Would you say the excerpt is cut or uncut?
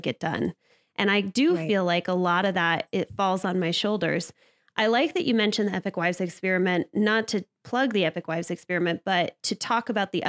uncut